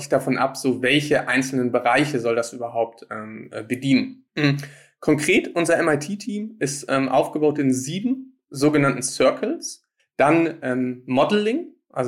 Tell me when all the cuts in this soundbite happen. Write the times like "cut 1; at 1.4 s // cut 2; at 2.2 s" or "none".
cut 1; at 4.3 s // cut 2; at 10.0 s